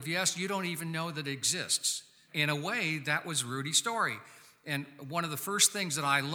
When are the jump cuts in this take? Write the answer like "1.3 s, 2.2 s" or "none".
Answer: none